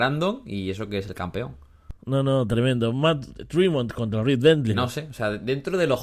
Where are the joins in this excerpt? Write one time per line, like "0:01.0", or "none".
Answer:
0:02.0
0:04.7